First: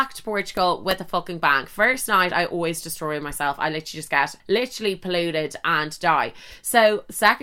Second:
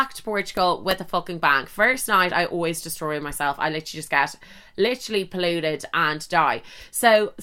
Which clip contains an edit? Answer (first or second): first